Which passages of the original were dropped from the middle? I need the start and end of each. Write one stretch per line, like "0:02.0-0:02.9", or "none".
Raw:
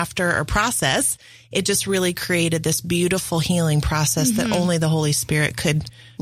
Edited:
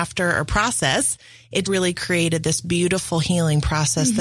0:01.6-0:01.8

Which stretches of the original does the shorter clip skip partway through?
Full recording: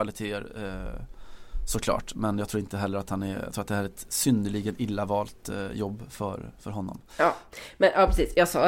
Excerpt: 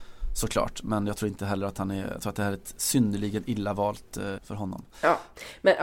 0:05.7-0:06.5

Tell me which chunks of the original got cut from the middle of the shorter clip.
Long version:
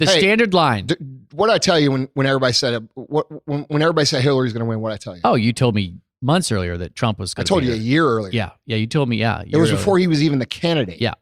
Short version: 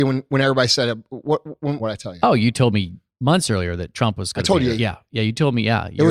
0:03.6-0:04.8
0:07.8-0:08.3

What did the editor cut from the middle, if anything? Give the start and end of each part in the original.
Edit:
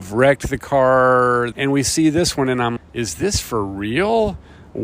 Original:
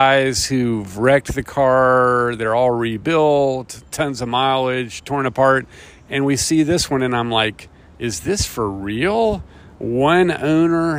0:02.4-0:06.1
0:07.3-0:07.8

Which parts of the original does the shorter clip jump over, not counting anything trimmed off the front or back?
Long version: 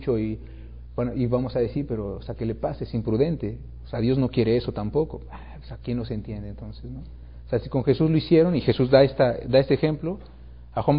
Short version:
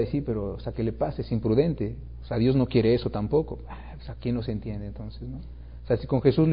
none

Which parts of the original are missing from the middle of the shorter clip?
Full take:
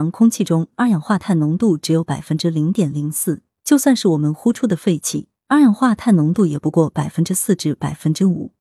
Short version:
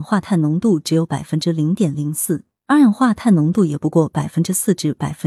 0:03.6-0:05.4

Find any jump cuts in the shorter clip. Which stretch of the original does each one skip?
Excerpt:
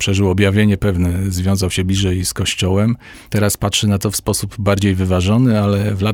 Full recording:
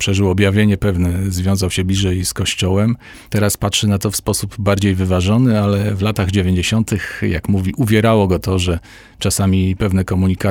none

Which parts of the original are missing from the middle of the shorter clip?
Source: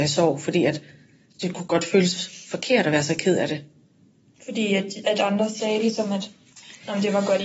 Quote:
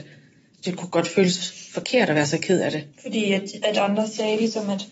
0:03.7-0:04.3

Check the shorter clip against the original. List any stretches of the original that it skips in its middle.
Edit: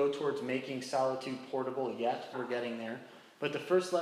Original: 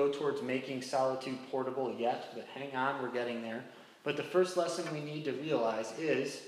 0:02.3-0:03.0

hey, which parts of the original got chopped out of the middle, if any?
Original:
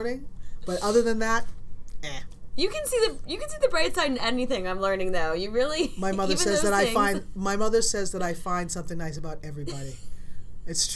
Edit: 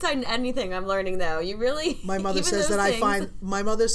none

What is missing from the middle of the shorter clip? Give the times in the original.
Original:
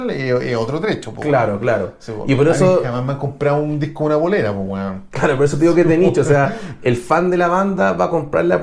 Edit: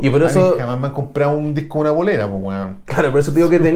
none

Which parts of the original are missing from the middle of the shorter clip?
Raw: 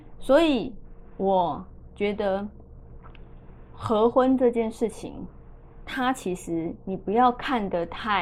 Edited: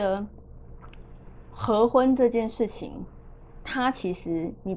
none

